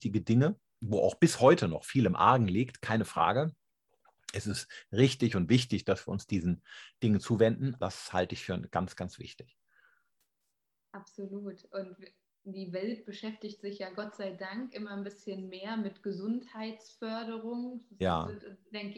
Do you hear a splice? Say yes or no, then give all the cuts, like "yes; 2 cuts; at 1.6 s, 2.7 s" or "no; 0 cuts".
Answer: yes; 1 cut; at 7.8 s